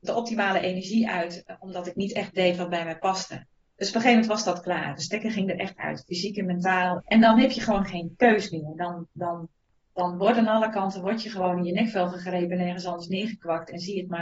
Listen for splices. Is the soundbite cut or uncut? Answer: cut